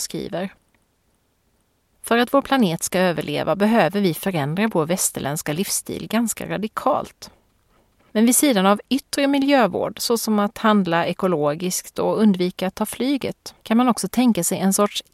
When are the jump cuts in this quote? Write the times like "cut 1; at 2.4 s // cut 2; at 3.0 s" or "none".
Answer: cut 1; at 8.0 s // cut 2; at 13.6 s